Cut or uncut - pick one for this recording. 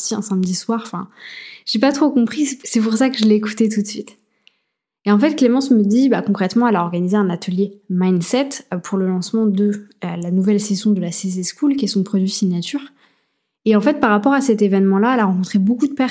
uncut